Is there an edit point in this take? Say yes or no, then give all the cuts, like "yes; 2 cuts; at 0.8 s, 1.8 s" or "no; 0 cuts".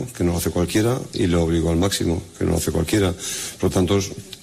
no; 0 cuts